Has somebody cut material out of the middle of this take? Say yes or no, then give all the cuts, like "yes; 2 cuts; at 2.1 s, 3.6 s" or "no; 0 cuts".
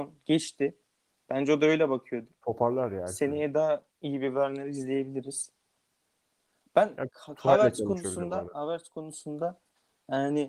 yes; 1 cut; at 3.9 s